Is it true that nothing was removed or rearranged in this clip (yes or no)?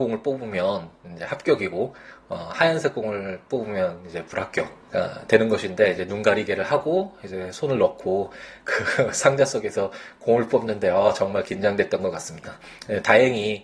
no